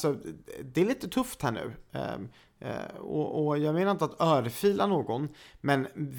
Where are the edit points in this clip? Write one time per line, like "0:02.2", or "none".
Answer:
none